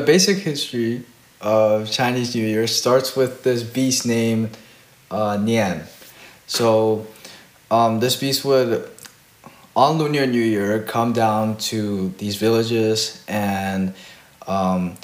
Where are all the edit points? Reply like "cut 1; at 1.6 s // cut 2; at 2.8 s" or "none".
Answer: none